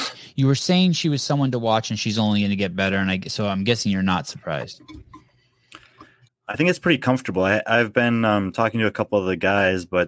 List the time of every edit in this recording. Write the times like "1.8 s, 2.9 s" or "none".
6.3 s